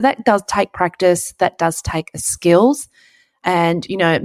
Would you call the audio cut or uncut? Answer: uncut